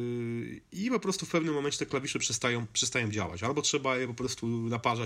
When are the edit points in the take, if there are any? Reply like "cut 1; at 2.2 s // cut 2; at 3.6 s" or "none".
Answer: none